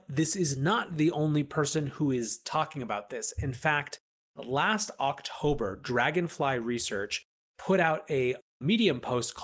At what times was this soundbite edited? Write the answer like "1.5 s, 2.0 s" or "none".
none